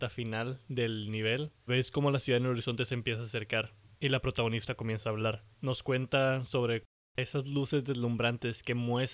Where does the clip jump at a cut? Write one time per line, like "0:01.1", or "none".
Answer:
0:01.7
0:05.5